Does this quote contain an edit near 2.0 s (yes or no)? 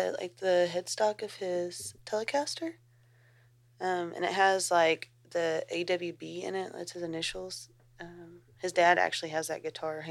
yes